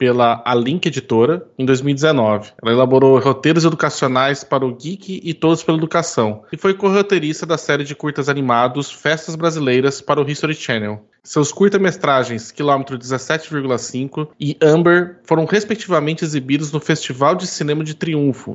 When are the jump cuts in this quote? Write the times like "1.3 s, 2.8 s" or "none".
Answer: 2.6 s